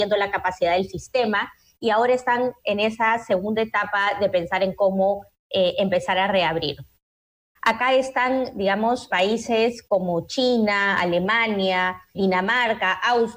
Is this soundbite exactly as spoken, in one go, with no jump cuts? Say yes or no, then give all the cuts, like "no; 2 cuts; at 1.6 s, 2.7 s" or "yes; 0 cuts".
no; 3 cuts; at 7.6 s, 9.1 s, 12.1 s